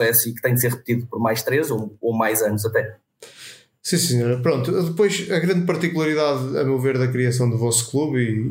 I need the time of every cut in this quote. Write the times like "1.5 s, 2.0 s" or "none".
none